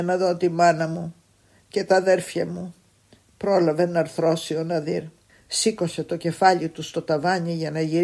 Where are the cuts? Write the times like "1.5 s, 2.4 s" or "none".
5.3 s